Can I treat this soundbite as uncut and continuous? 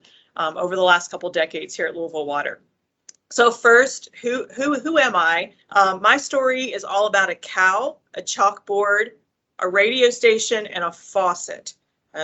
no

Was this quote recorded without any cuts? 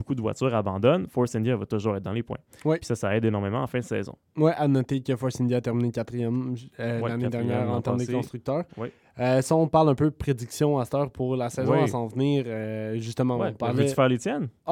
yes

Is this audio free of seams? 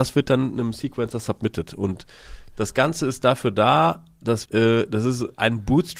no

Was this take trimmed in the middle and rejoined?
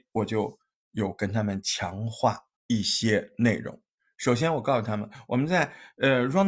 yes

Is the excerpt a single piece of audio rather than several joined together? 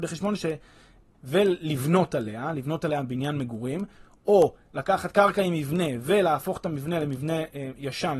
no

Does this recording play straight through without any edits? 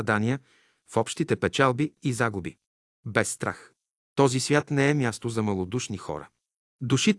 yes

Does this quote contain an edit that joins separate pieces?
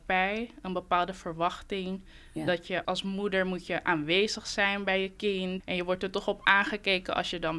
yes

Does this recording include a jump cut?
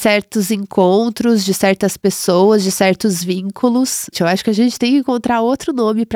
yes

